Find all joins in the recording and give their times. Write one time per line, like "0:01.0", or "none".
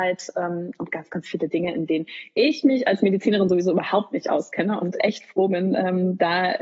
none